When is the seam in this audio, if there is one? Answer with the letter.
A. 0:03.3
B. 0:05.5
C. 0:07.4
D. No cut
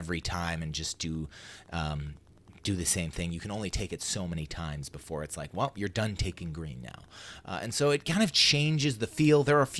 D